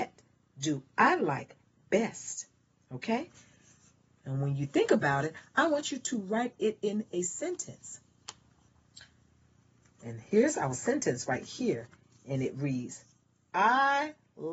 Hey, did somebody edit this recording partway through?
no; 0 cuts

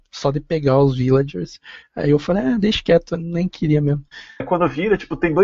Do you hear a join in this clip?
yes; 1 cut; at 4.4 s

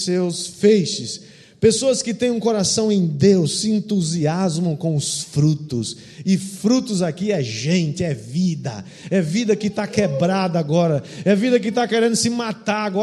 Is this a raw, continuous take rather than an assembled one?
yes; 0 cuts

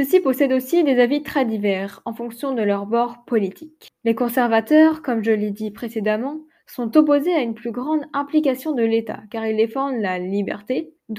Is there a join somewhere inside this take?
no; 0 cuts

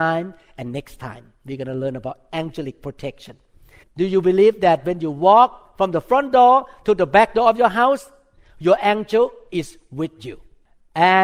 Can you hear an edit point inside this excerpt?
yes; 1 cut; at 3.8 s

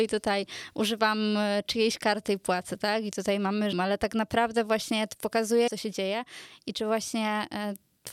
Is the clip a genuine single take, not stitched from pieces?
no; 2 cuts; at 3.7 s, 5.7 s

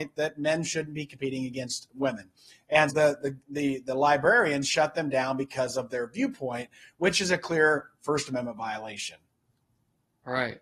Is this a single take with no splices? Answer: no; 1 cut; at 2.9 s

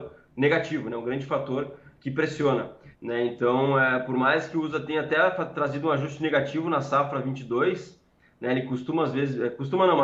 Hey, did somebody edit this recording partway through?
yes; 1 cut; at 2.9 s

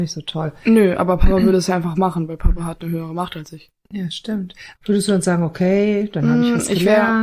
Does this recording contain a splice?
yes; 1 cut; at 4.7 s

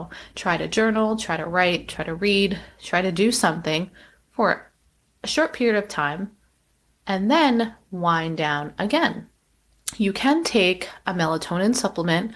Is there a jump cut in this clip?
no; 0 cuts

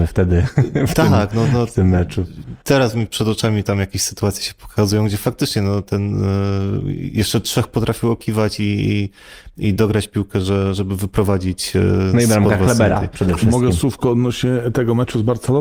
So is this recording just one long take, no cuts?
yes; 0 cuts

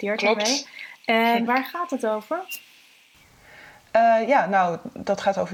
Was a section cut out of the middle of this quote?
yes; 1 cut; at 1.5 s

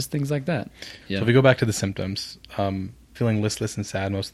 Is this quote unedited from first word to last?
no; 2 cuts; at 1.0 s, 3.1 s

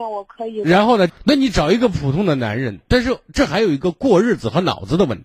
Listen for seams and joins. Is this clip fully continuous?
no; 1 cut; at 1.1 s

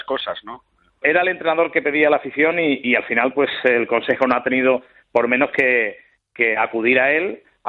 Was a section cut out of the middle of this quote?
yes; 1 cut; at 1.0 s

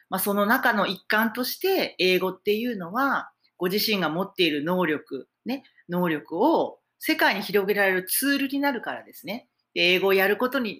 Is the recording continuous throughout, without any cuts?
yes; 0 cuts

